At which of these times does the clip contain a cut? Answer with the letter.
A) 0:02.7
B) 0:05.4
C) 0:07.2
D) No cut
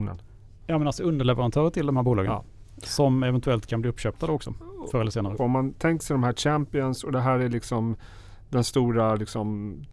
B